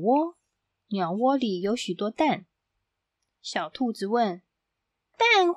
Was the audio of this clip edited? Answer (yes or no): no